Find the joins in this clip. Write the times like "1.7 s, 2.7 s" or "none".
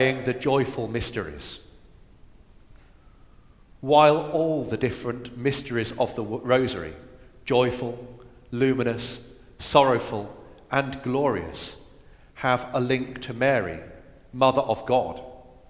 none